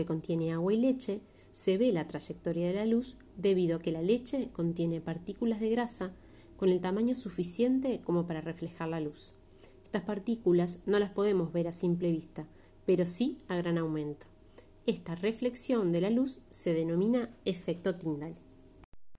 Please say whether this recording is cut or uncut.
uncut